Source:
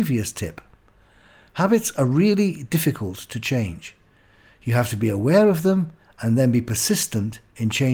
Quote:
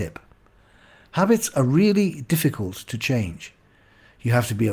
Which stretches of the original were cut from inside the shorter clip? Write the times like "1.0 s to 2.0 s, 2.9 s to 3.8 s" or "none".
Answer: none